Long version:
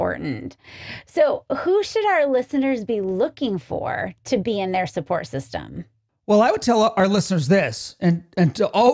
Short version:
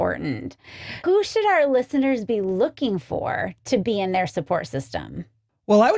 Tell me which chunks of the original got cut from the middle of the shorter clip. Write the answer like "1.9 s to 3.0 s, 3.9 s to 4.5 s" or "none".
1.0 s to 1.6 s